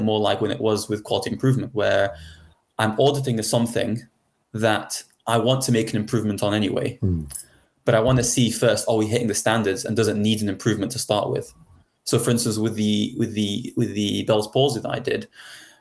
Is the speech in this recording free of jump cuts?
yes; 0 cuts

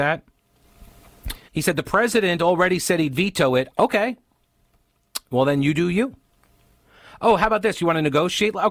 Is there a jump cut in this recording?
yes; 2 cuts; at 1.5 s, 3.7 s

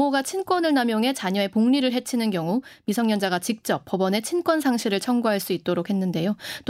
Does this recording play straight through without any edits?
yes; 0 cuts

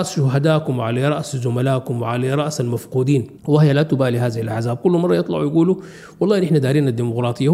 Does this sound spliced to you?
yes; 1 cut; at 3.4 s

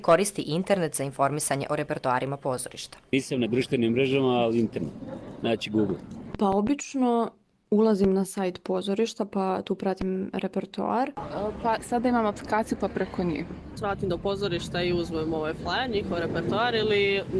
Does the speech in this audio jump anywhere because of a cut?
no; 0 cuts

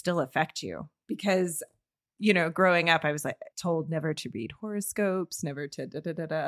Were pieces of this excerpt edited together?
yes; 2 cuts; at 1.0 s, 3.5 s

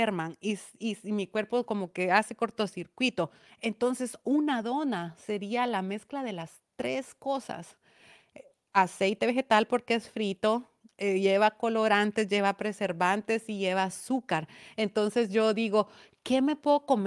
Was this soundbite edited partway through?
no; 0 cuts

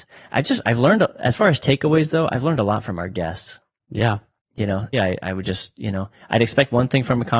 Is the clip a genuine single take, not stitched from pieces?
no; 1 cut; at 4.9 s

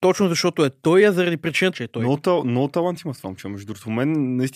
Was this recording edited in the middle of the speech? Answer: yes; 1 cut; at 1.7 s

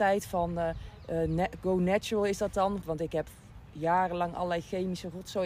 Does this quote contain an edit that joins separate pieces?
yes; 1 cut; at 2.8 s

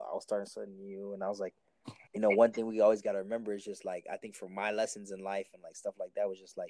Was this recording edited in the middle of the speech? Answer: yes; 1 cut; at 2.1 s

